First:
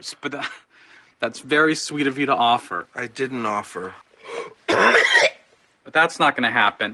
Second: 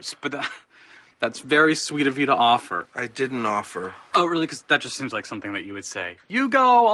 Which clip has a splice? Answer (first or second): first